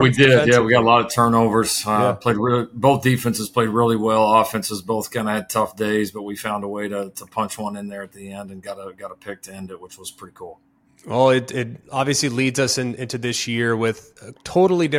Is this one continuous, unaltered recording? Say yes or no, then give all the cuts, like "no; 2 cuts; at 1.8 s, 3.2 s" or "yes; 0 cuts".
yes; 0 cuts